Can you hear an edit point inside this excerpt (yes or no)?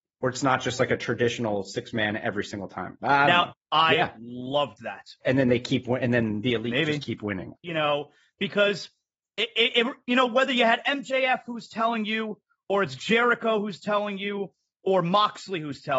yes